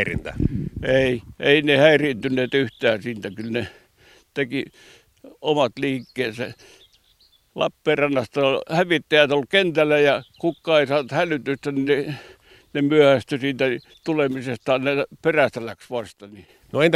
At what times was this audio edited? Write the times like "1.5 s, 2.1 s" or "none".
none